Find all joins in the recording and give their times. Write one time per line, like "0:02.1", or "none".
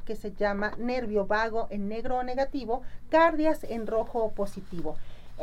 none